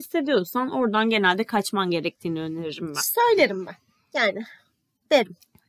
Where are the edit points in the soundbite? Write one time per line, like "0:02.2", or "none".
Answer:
none